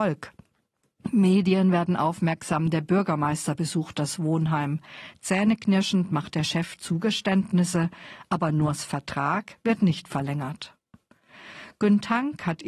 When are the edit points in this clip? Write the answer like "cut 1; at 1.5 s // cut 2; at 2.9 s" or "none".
none